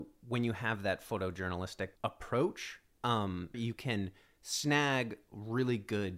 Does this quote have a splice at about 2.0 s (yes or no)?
yes